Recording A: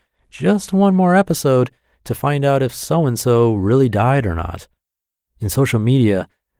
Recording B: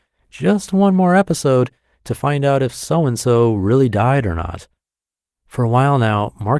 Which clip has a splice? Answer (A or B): B